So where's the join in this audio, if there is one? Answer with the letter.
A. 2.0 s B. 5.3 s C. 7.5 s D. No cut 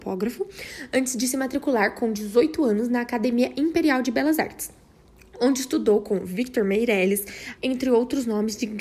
C